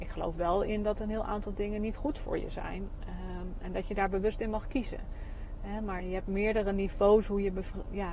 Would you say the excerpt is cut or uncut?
cut